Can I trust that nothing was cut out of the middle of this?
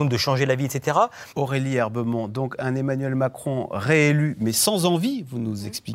no; 1 cut; at 1.3 s

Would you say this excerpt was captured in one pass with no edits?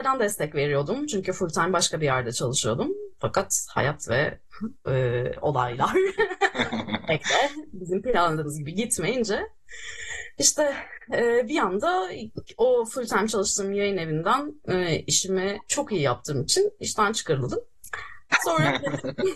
yes; 0 cuts

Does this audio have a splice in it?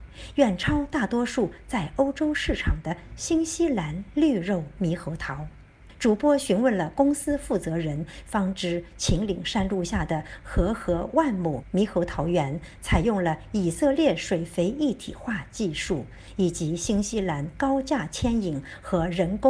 no; 0 cuts

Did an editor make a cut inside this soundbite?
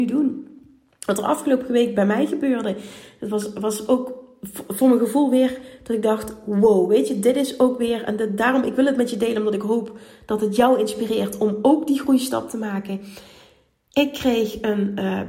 no; 0 cuts

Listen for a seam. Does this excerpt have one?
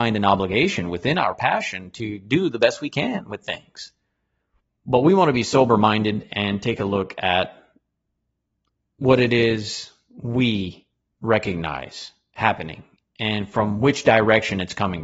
yes; 1 cut; at 4.8 s

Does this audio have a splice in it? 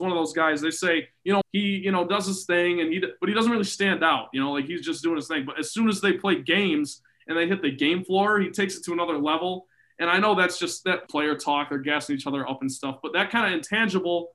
yes; 2 cuts; at 1.4 s, 11.1 s

